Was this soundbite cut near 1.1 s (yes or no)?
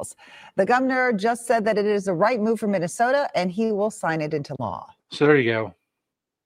no